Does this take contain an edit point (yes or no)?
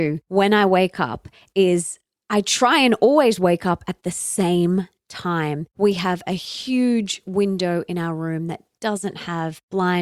yes